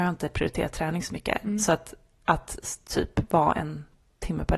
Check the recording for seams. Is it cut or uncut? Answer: uncut